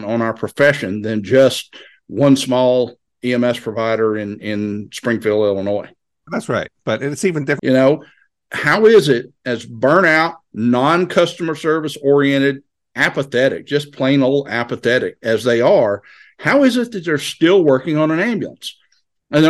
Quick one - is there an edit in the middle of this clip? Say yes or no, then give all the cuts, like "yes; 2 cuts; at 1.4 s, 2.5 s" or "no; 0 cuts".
yes; 3 cuts; at 6.3 s, 7.6 s, 10.5 s